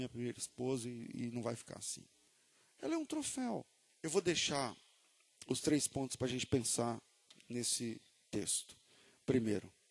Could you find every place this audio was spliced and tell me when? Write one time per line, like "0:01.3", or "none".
0:03.9